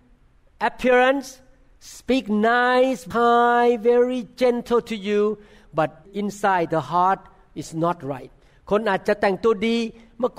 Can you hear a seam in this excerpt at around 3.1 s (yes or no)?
yes